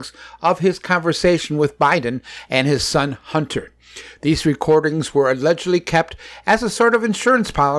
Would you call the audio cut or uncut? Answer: uncut